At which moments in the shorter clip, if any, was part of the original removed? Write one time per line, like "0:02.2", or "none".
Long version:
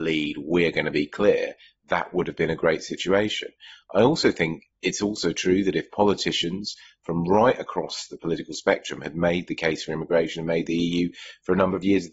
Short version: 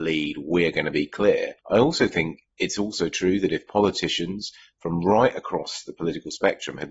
0:01.6